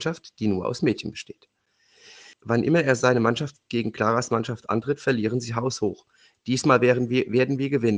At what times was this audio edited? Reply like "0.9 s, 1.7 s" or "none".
2.3 s